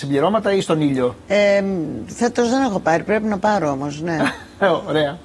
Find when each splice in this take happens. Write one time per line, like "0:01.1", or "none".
none